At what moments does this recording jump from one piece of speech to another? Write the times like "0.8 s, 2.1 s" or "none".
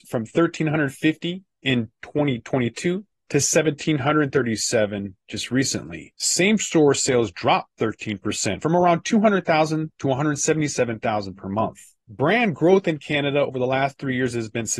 6.1 s